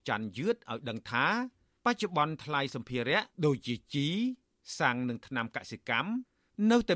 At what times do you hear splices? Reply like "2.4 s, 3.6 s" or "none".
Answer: 3.3 s